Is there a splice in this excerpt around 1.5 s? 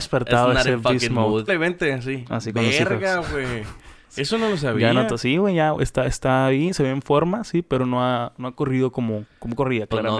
yes; 1 cut; at 1.5 s

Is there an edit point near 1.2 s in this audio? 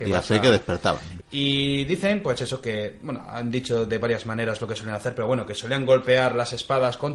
yes; 1 cut; at 1.2 s

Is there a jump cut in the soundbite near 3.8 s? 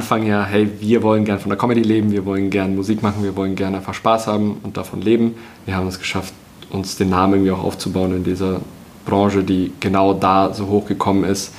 no; 1 cut; at 5.6 s

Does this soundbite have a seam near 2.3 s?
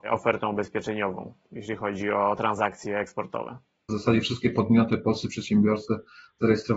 no; 1 cut; at 3.9 s

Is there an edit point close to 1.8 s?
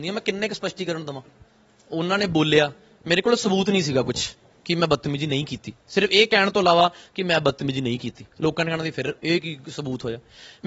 no; 1 cut; at 9.2 s

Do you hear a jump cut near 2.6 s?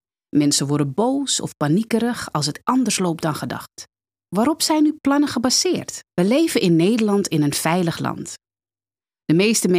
yes; 3 cuts; at 2.6 s, 4.2 s, 6.1 s

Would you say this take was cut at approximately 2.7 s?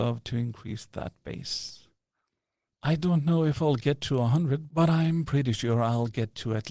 yes; 1 cut; at 2.7 s

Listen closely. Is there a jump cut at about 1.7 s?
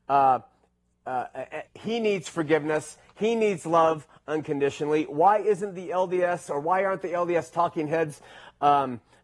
yes; 1 cut; at 1.7 s

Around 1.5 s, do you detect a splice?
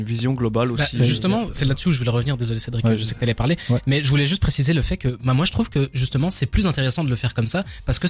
no; 0 cuts

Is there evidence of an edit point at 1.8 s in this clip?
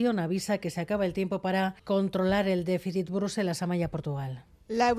yes; 1 cut; at 1.8 s

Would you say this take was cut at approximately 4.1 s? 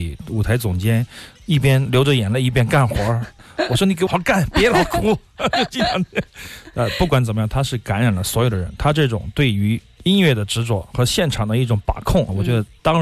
yes; 1 cut; at 4.1 s

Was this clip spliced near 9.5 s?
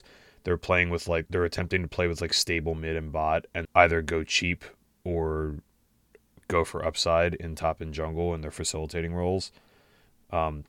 no; 2 cuts; at 1.3 s, 3.6 s

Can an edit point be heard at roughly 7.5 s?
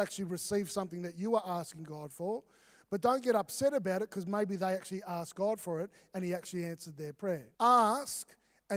yes; 1 cut; at 7.5 s

